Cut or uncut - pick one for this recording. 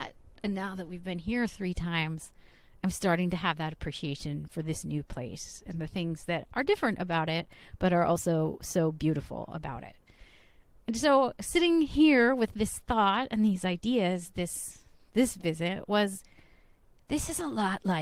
uncut